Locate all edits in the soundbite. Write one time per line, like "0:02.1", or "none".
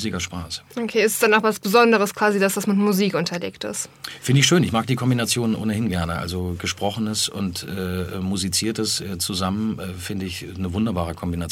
none